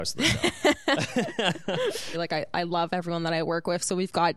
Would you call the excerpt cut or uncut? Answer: cut